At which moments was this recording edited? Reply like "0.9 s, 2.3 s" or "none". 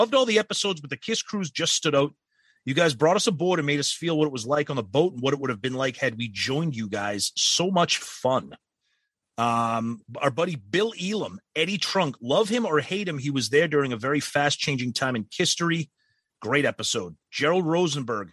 none